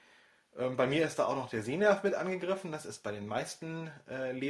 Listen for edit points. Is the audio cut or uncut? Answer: uncut